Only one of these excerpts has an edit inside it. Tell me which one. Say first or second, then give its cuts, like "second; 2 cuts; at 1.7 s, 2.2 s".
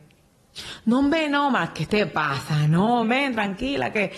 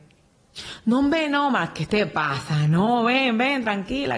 first; 1 cut; at 3.0 s